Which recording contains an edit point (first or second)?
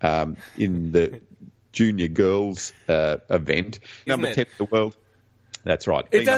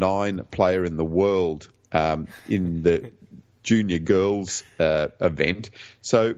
first